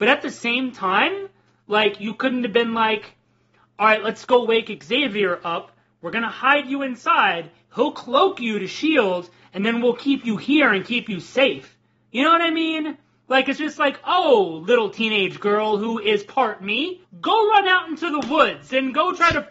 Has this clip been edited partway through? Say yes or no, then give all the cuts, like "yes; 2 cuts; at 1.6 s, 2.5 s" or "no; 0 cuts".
no; 0 cuts